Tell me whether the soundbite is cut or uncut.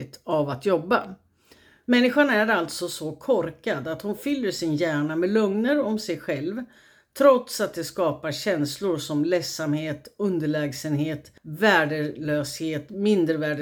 cut